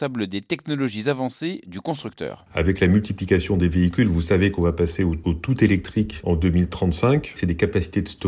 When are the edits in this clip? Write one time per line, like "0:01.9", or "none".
none